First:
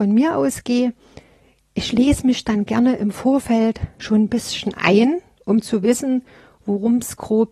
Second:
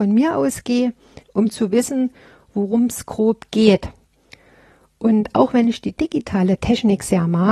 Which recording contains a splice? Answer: second; 1 cut; at 1.2 s

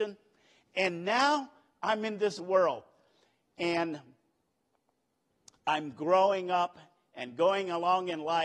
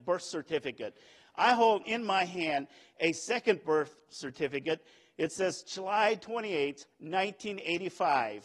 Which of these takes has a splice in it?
second; 1 cut; at 1.8 s

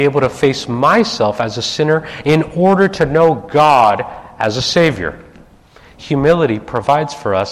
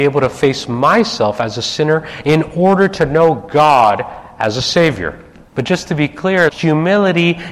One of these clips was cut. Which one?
second; 2 cuts; at 5.5 s, 6.5 s

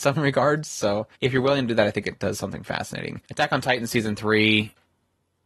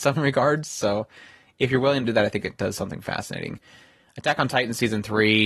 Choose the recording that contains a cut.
first; 2 cuts; at 1.1 s, 3.2 s

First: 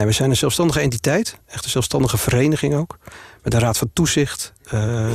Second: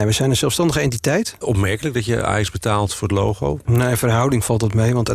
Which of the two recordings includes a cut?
second; 2 cuts; at 1.4 s, 3.6 s

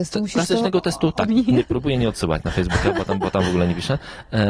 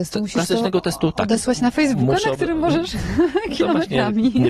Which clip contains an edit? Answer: first; 1 cut; at 1.3 s

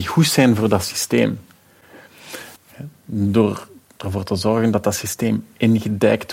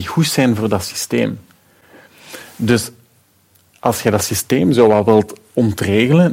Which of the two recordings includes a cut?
first; 1 cut; at 2.6 s

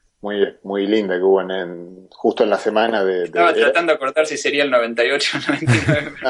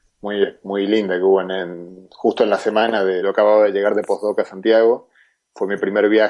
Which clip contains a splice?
second; 1 cut; at 3.2 s

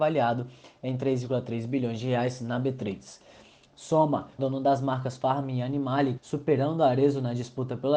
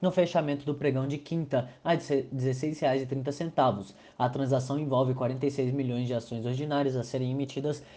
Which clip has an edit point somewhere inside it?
first; 2 cuts; at 4.4 s, 6.2 s

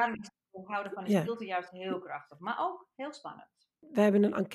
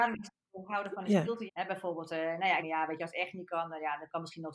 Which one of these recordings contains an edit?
second; 2 cuts; at 1.5 s, 2.6 s

